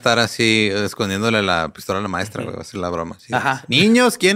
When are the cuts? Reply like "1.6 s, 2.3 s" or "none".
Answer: none